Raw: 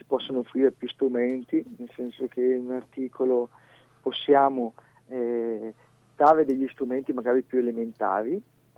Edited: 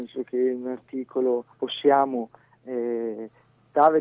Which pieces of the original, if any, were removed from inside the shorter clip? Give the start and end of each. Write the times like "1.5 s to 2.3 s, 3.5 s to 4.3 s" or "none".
3.6 s to 4.0 s